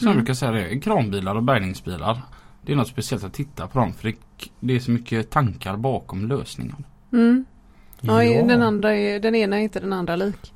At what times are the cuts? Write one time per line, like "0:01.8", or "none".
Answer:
none